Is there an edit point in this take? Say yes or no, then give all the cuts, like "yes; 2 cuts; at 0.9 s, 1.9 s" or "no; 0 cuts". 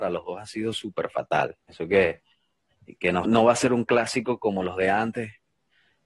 yes; 2 cuts; at 1.6 s, 3.2 s